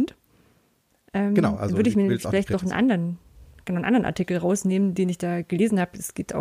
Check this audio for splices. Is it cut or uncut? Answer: uncut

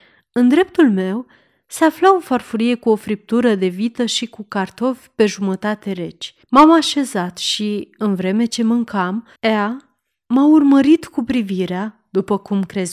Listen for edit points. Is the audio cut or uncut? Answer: cut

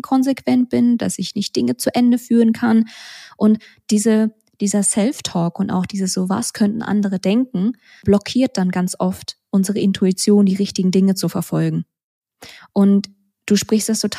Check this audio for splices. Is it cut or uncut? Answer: uncut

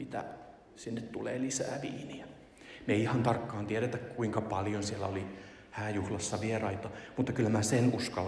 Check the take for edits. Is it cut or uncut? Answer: uncut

